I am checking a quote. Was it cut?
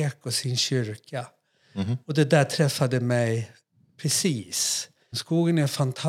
yes; 1 cut; at 5.1 s

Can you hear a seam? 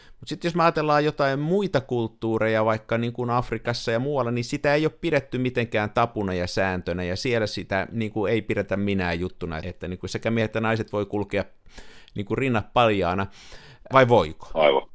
yes; 2 cuts; at 9.6 s, 13.9 s

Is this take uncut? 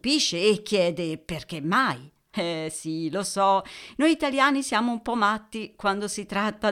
no; 1 cut; at 2.3 s

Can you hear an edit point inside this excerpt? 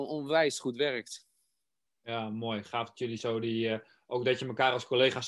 yes; 1 cut; at 1.9 s

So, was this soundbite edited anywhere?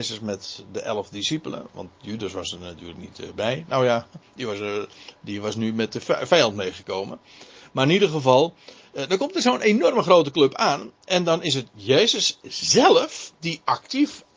no; 0 cuts

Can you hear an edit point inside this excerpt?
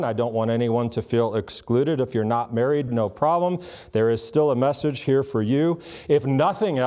yes; 1 cut; at 2.9 s

